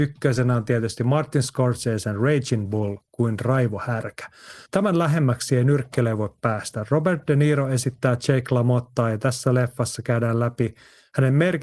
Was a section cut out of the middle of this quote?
yes; 1 cut; at 4.7 s

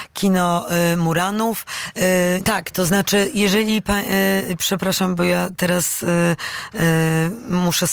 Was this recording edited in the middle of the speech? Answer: yes; 1 cut; at 2.4 s

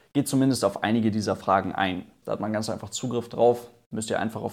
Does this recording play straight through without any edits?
no; 1 cut; at 2.2 s

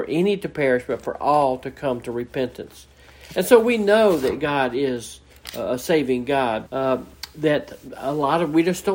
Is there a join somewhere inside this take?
yes; 1 cut; at 6.7 s

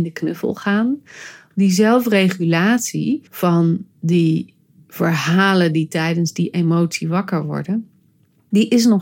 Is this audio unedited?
no; 2 cuts; at 1.5 s, 3.3 s

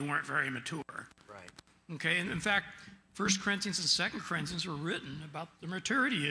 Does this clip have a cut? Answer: no; 0 cuts

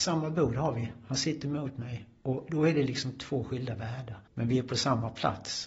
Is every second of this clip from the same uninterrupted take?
no; 1 cut; at 4.3 s

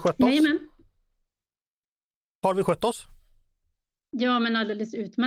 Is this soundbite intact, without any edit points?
yes; 0 cuts

